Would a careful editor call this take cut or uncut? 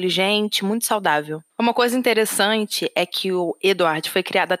cut